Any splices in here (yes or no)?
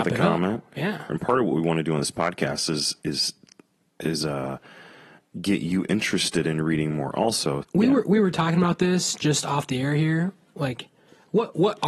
yes